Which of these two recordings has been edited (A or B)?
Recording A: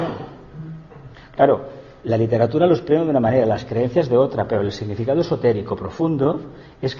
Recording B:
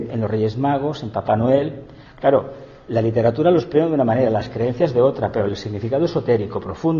B